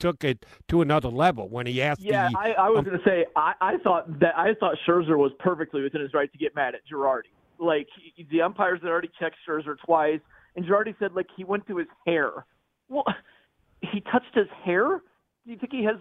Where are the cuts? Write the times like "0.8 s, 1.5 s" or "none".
none